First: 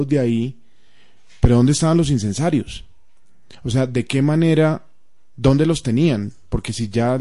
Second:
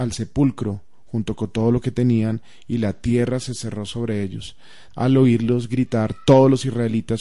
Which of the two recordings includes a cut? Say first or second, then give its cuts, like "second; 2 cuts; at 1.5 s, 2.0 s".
second; 1 cut; at 4.9 s